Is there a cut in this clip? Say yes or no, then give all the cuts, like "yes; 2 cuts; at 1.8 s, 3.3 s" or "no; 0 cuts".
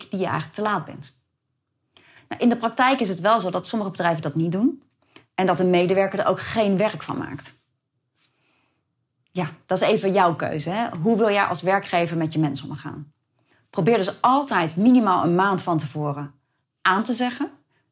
no; 0 cuts